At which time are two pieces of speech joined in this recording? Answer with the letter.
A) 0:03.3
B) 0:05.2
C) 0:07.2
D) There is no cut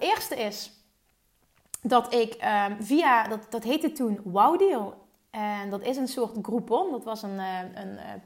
D